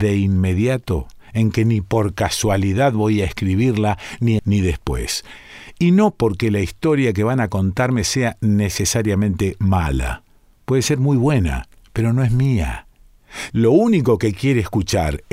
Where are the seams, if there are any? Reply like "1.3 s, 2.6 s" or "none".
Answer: 4.4 s, 13.5 s